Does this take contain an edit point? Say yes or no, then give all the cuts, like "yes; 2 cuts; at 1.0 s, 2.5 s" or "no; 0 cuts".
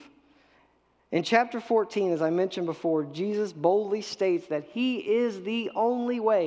no; 0 cuts